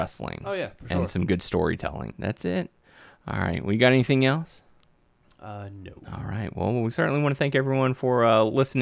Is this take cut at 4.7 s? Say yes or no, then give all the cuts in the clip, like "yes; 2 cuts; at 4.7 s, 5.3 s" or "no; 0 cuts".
no; 2 cuts; at 2.1 s, 6.0 s